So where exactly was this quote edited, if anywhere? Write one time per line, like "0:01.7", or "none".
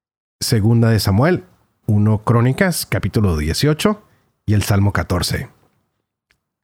0:01.8